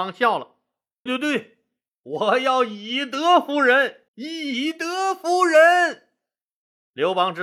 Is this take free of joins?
no; 2 cuts; at 1.1 s, 4.1 s

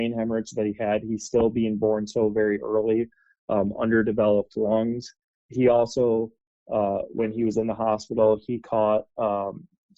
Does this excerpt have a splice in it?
no; 0 cuts

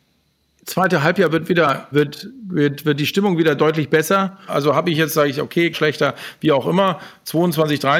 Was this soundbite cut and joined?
yes; 3 cuts; at 1.9 s, 4.5 s, 5.7 s

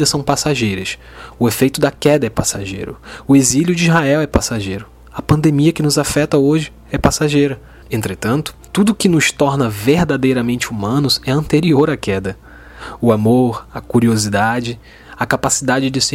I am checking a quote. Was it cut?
yes; 1 cut; at 7.8 s

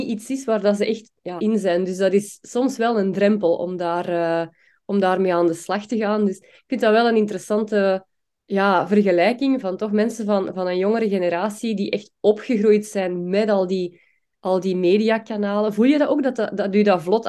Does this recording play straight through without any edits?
no; 2 cuts; at 1.4 s, 9.6 s

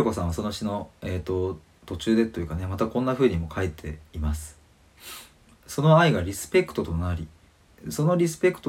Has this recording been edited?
no; 0 cuts

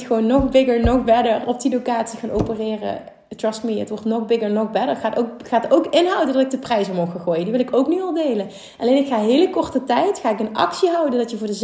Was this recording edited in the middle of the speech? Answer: yes; 1 cut; at 1.4 s

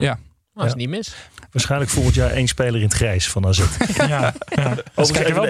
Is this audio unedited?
yes; 0 cuts

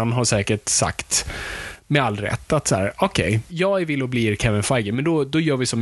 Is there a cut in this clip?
yes; 1 cut; at 3.5 s

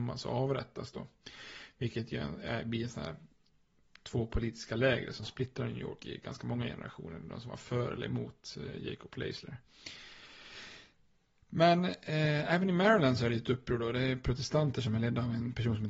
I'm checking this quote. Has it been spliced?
no; 0 cuts

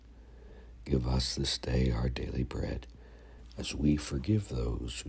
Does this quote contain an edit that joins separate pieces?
yes; 1 cut; at 3.4 s

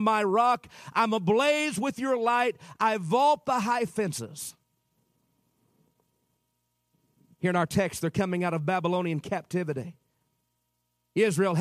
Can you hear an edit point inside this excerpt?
no; 0 cuts

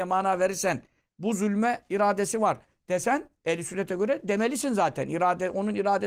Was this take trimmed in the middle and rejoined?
no; 0 cuts

